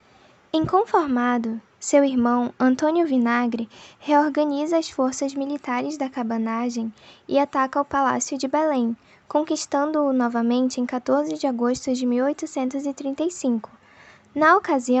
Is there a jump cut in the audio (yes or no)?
no